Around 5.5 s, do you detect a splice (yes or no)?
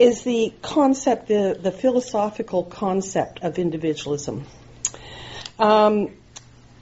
no